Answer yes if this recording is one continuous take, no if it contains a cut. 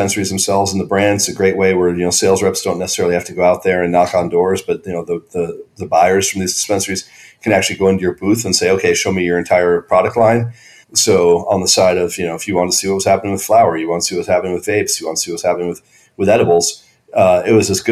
no